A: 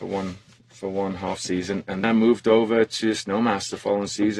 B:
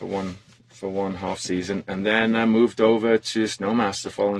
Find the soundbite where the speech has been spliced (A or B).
A